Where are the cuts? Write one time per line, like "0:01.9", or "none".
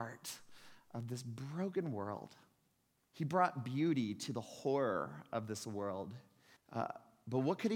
0:03.0
0:06.6